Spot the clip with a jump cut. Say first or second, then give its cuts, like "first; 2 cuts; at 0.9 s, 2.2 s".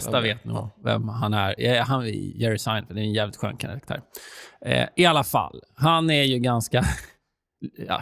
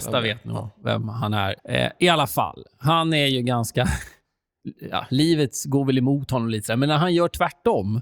second; 1 cut; at 1.6 s